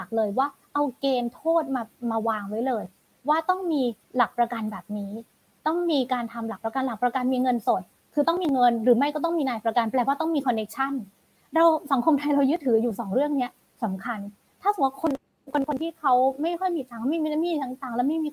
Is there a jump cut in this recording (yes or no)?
yes